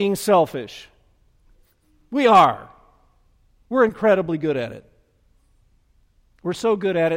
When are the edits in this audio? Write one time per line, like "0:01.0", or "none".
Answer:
none